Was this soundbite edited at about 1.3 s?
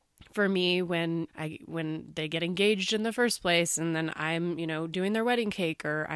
yes; 1 cut; at 1.3 s

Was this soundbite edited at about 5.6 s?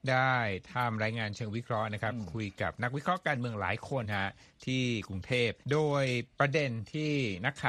yes; 2 cuts; at 4.0 s, 5.6 s

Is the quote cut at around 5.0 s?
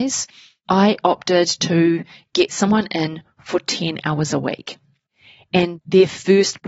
no; 0 cuts

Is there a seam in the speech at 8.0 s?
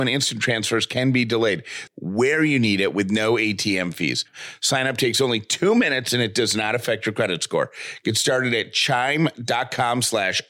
no; 1 cut; at 1.9 s

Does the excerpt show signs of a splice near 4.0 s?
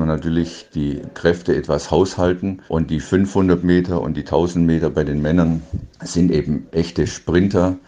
no; 2 cuts; at 2.7 s, 5.9 s

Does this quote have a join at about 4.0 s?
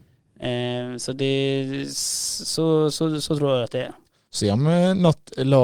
no; 0 cuts

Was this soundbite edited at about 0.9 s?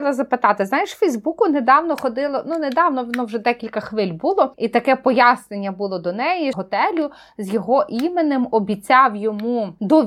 no; 2 cuts; at 4.5 s, 6.5 s

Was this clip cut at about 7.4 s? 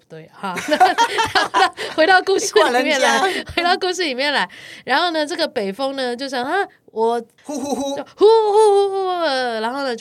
yes; 1 cut; at 7.4 s

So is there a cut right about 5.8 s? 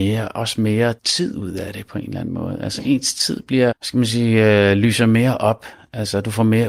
no; 2 cuts; at 1.0 s, 3.7 s

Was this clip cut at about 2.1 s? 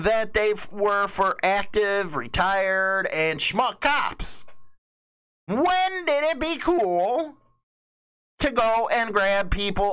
no; 0 cuts

